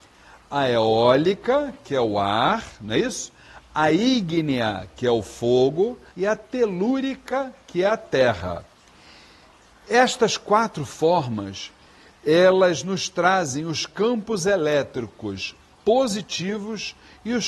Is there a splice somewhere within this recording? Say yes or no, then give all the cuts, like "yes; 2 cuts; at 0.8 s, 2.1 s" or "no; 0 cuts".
yes; 1 cut; at 6.1 s